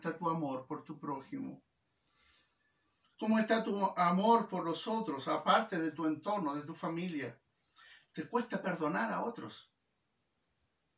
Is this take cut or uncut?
cut